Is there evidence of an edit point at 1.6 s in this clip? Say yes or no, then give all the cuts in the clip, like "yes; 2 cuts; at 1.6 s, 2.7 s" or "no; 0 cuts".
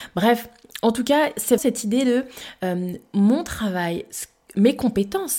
yes; 1 cut; at 1.6 s